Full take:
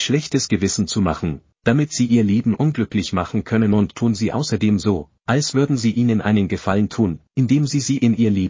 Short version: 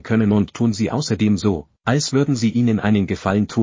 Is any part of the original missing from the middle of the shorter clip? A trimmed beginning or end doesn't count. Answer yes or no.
no